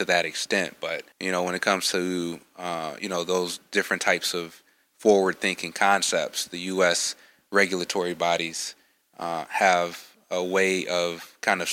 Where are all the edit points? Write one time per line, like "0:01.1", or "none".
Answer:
0:01.1